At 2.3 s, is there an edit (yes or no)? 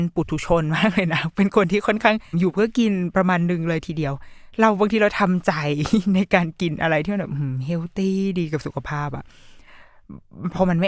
yes